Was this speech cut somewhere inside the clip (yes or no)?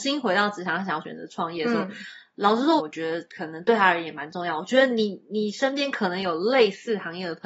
yes